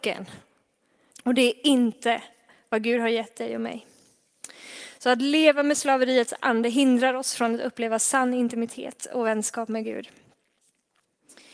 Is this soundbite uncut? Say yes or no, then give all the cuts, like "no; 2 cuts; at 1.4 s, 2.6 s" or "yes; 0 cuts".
no; 1 cut; at 1.1 s